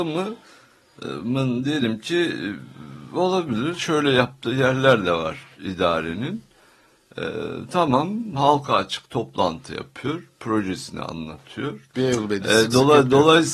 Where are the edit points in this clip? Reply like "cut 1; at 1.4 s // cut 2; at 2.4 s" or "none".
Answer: cut 1; at 11.9 s

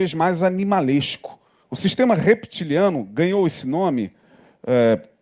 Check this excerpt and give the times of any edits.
cut 1; at 1.6 s

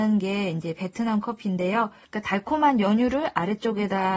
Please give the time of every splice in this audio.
cut 1; at 2.0 s

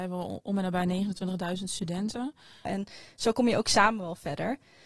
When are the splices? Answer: cut 1; at 2.6 s

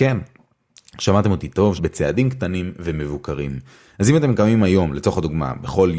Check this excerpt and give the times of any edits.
cut 1; at 1.8 s

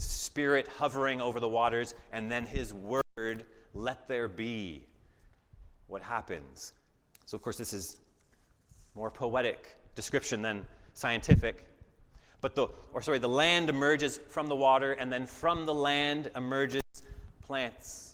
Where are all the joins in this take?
cut 1; at 7.1 s // cut 2; at 12.9 s

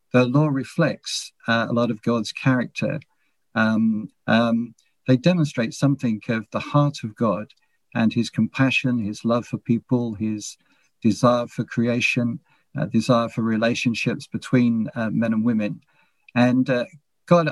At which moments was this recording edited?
cut 1; at 4.1 s

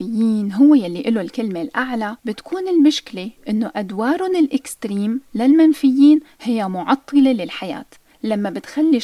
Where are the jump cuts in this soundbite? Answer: cut 1; at 2.2 s

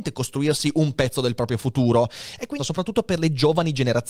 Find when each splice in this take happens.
cut 1; at 2.6 s

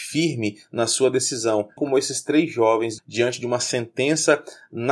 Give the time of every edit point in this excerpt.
cut 1; at 1.8 s // cut 2; at 3.0 s

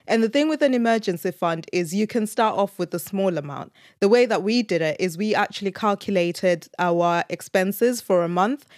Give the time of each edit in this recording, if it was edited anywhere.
none

